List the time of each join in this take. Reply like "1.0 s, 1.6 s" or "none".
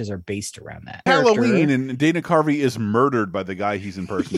1.1 s